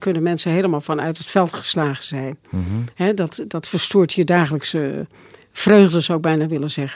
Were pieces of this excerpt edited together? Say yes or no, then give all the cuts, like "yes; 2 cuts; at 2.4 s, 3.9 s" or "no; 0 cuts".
no; 0 cuts